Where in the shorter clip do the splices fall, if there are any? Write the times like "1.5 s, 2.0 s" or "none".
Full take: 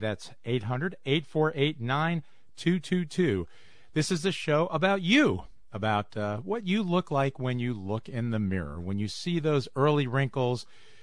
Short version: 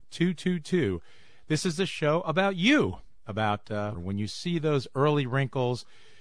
3.9 s

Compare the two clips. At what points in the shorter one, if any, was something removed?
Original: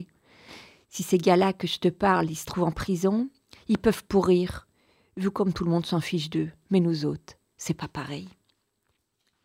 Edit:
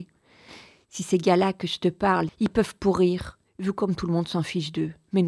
2.3 s, 3.5 s

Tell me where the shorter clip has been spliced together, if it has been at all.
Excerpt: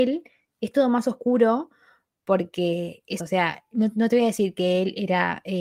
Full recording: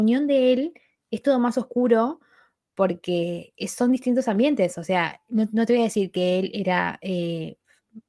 3.2 s

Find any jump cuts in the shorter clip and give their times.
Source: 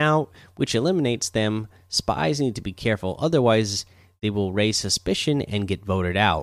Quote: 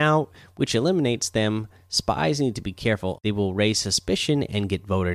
3.2 s

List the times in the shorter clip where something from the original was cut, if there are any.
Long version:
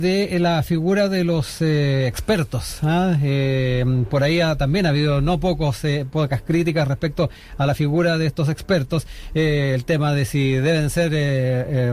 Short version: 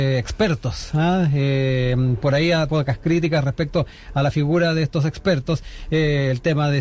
2.7 s

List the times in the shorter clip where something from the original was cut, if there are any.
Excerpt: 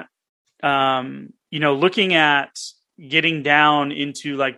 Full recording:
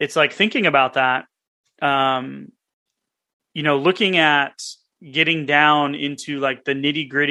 1.4 s

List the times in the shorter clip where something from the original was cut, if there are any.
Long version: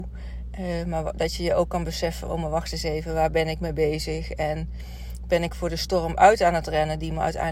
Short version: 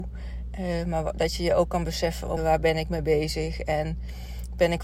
2.4 s

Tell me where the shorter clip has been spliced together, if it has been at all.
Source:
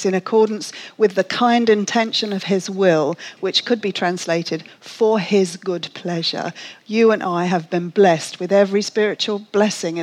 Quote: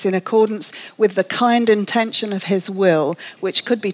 none

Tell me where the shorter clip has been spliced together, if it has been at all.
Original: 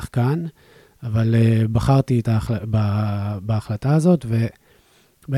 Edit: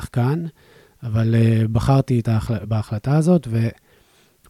2.6 s

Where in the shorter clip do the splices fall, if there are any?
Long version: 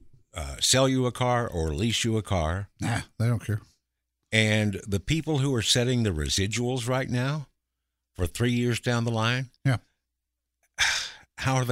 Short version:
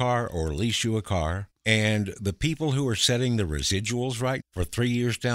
1.5 s, 4.4 s

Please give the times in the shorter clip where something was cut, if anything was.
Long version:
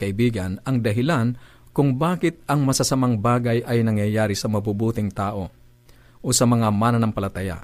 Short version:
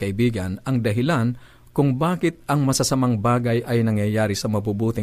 none

